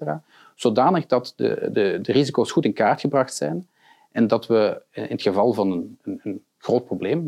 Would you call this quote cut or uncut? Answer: uncut